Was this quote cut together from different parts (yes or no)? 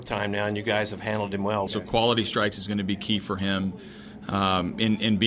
yes